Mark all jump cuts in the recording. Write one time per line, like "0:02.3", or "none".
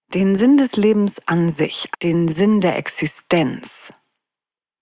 0:01.9